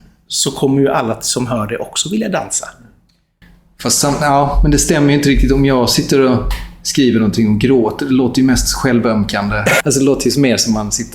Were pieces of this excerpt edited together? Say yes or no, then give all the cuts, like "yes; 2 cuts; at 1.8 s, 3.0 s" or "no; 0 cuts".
yes; 1 cut; at 9.8 s